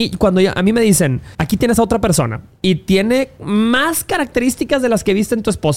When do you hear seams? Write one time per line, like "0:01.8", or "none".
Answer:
0:01.3